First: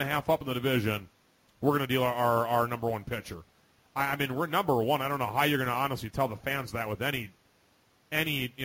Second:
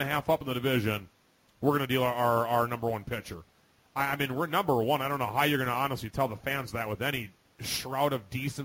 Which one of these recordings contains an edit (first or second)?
second